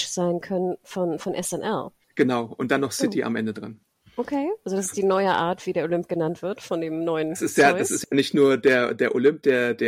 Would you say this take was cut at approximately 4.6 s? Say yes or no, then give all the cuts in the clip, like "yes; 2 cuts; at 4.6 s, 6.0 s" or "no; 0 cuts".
no; 1 cut; at 2.0 s